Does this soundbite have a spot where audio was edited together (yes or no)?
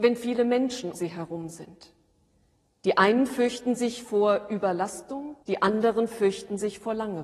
yes